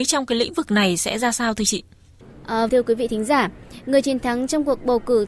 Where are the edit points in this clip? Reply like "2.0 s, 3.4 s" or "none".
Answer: 2.7 s